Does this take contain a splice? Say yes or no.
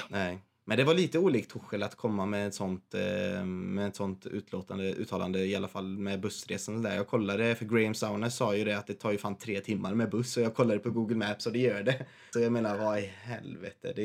yes